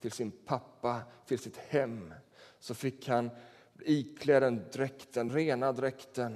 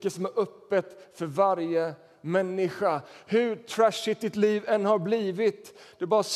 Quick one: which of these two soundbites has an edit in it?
first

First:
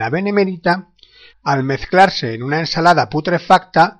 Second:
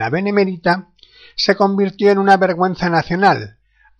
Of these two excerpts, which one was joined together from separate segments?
first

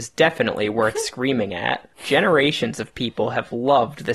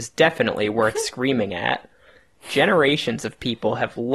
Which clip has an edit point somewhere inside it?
first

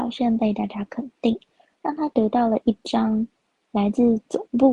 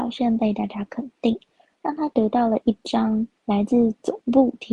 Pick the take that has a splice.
second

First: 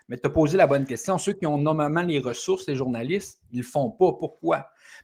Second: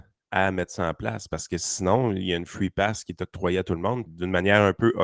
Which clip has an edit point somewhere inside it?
second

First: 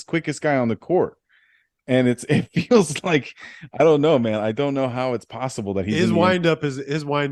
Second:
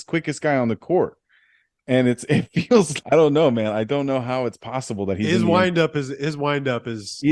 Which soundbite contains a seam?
second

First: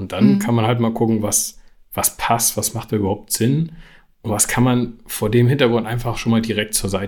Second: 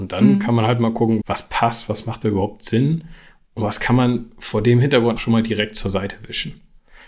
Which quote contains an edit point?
second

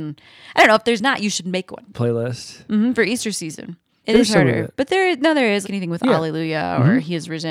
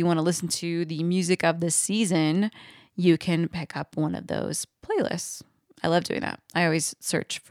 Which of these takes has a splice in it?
first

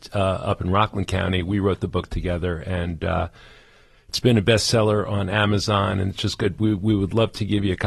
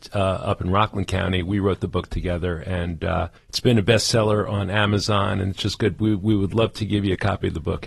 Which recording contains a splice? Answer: second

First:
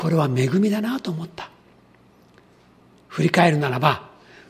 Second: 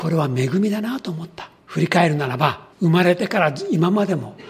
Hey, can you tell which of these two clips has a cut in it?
second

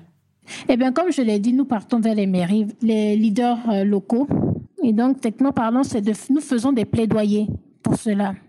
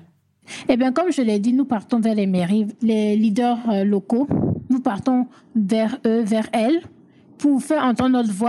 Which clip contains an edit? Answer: first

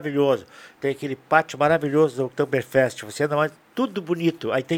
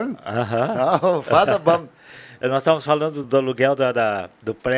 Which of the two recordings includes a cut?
second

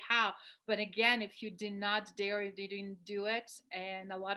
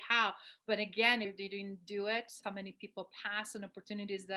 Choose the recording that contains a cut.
second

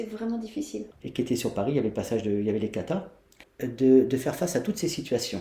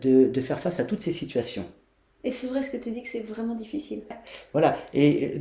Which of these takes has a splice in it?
first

